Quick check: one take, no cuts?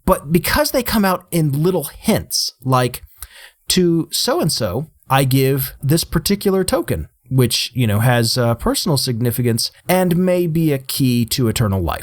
yes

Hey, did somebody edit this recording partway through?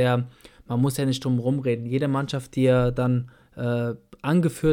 no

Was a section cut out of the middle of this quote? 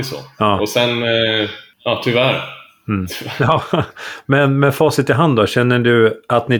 no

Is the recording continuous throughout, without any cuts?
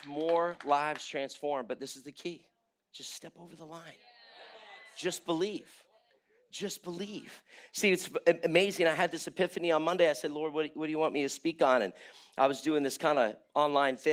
yes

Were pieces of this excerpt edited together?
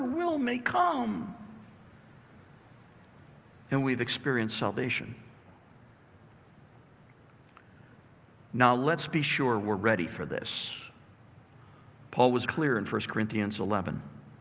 yes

